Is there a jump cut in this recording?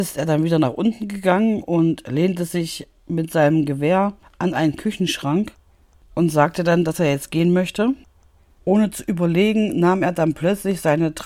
yes; 1 cut; at 8.4 s

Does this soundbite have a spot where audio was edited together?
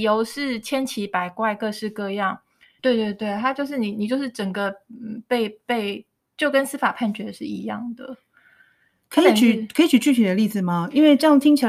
yes; 1 cut; at 2.8 s

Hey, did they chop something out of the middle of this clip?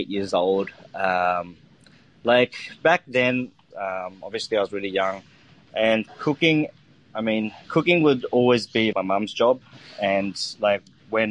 yes; 3 cuts; at 3.7 s, 7.6 s, 8.9 s

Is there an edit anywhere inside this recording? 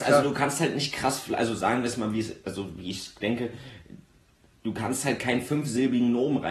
no; 0 cuts

